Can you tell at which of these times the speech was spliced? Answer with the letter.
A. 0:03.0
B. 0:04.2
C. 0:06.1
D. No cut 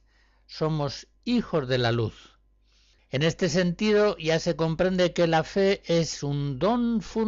A